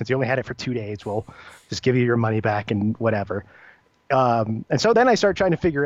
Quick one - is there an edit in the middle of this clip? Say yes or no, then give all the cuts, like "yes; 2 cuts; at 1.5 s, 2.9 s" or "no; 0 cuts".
no; 0 cuts